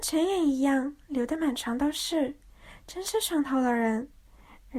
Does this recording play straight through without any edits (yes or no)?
yes